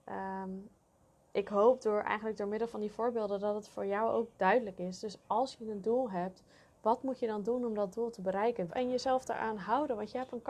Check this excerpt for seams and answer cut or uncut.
cut